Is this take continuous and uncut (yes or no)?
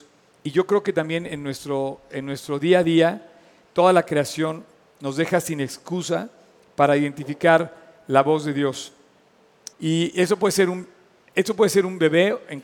no